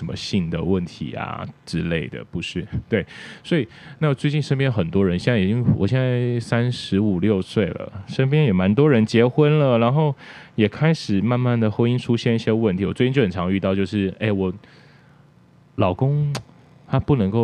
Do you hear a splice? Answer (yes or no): no